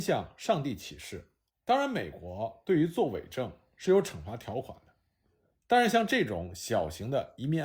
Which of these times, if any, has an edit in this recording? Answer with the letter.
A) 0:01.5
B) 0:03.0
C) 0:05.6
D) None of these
A